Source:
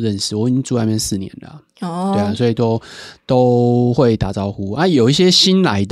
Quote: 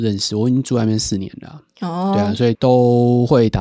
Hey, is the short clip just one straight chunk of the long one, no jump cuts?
no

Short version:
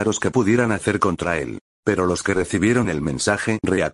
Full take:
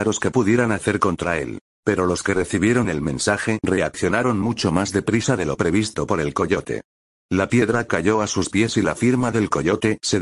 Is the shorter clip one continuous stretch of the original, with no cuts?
yes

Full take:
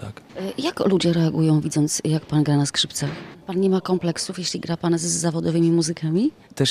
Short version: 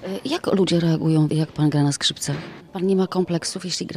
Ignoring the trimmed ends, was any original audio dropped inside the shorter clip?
yes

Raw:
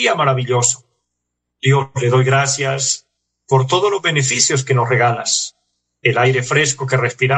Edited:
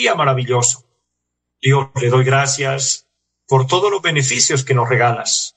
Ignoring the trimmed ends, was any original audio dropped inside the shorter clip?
no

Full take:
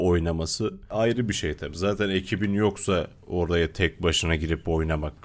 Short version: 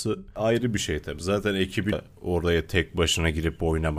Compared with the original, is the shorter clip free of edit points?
no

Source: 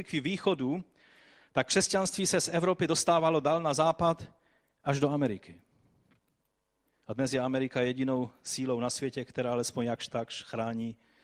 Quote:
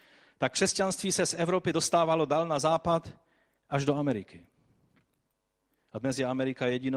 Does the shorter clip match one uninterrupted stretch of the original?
yes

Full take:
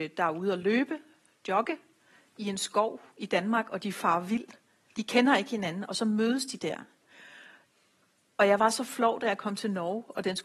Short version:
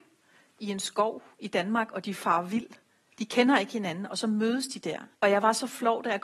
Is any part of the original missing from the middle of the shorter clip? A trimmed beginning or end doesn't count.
yes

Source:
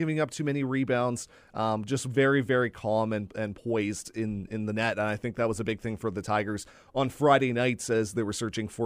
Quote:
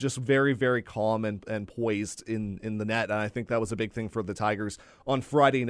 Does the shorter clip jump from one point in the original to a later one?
no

